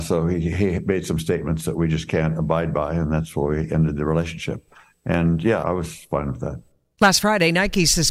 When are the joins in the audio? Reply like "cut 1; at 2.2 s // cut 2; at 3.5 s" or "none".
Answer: cut 1; at 5.6 s